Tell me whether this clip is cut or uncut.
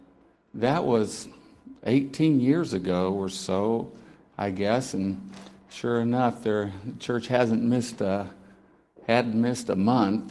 uncut